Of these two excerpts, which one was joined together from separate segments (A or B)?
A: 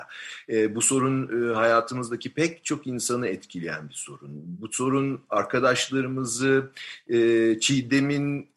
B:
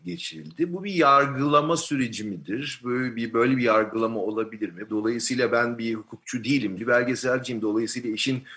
B